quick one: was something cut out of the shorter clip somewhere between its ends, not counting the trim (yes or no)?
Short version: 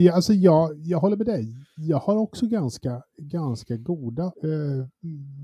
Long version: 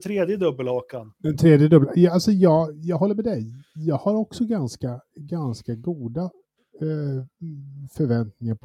yes